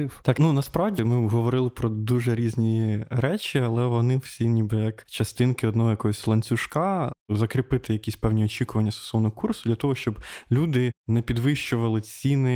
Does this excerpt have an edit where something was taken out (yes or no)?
yes